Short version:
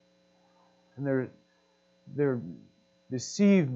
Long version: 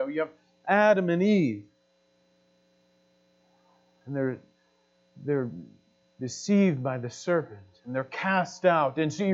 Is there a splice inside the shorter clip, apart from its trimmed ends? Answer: no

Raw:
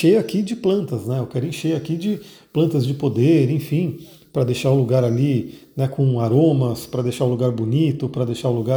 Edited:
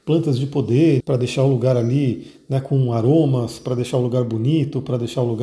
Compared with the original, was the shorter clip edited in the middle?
yes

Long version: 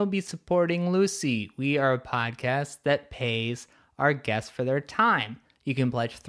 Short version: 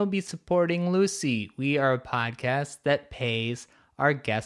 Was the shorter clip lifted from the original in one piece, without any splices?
yes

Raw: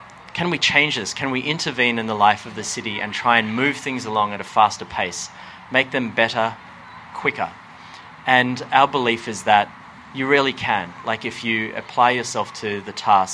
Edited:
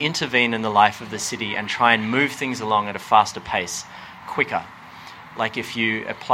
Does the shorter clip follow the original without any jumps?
no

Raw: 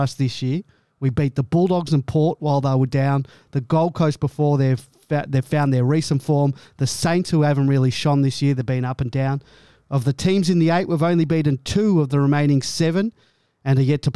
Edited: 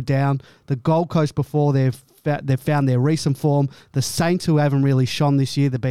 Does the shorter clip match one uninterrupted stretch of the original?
yes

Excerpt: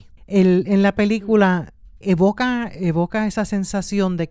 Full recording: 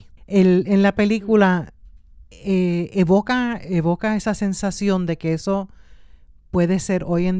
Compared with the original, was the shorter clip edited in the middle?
yes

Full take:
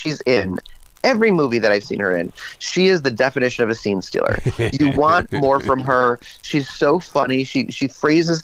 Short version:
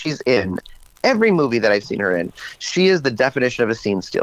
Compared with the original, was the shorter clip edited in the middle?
no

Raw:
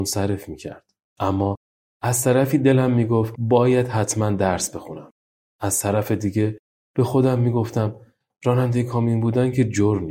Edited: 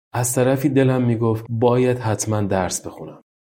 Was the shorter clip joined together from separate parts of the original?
no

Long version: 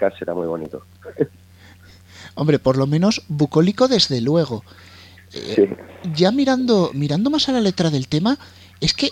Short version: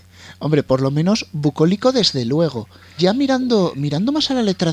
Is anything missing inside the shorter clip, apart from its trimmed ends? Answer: yes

